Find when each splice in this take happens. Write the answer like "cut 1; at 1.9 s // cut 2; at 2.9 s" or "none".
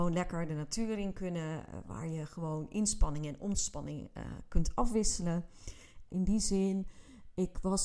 cut 1; at 6.1 s

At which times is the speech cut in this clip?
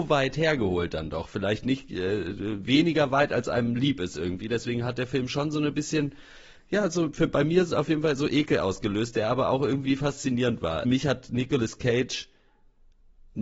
cut 1; at 10.8 s

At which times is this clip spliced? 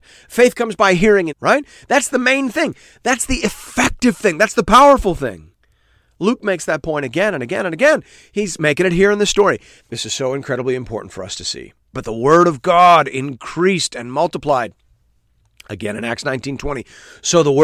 cut 1; at 1.3 s // cut 2; at 9.8 s // cut 3; at 11.9 s

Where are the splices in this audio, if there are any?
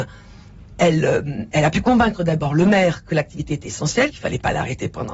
cut 1; at 4.1 s

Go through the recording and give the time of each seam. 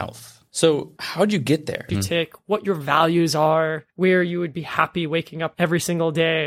cut 1; at 1.9 s

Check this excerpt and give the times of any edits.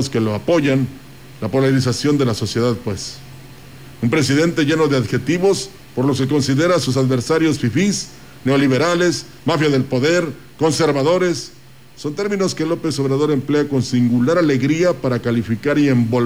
none

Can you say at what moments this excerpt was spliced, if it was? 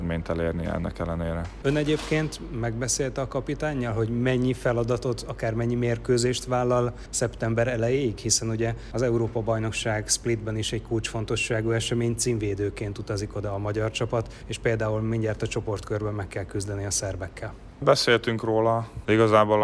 none

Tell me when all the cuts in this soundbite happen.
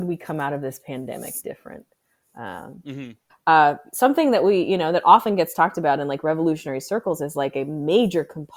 cut 1; at 3.3 s

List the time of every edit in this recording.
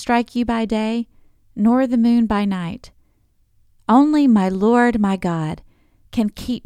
cut 1; at 3.8 s

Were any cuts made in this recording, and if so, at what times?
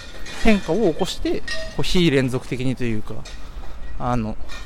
none

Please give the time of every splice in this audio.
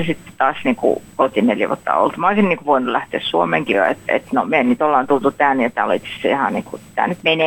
cut 1; at 3.7 s

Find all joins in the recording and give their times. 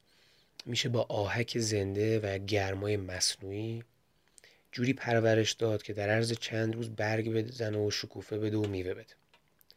none

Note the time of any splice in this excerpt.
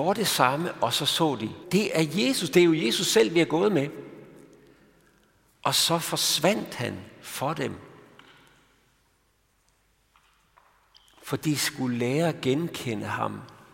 cut 1; at 1.6 s

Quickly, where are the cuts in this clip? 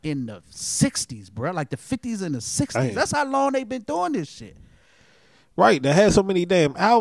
none

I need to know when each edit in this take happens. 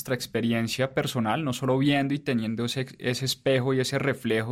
none

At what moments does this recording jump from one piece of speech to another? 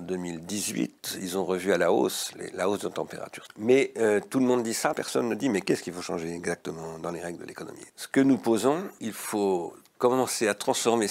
cut 1; at 3.5 s // cut 2; at 4.9 s // cut 3; at 9.0 s

